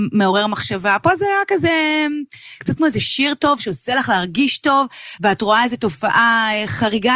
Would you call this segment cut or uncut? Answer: cut